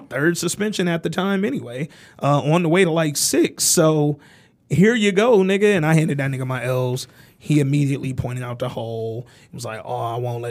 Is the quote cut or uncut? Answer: uncut